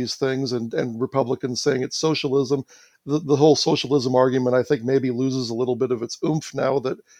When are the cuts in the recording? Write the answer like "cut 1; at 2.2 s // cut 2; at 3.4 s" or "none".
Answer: none